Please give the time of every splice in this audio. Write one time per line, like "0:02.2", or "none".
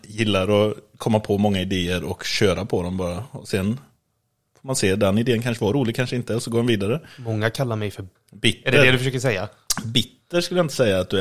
0:08.1